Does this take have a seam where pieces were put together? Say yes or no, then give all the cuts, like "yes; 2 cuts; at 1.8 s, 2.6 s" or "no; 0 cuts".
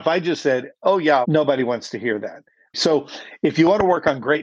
yes; 2 cuts; at 1.2 s, 2.7 s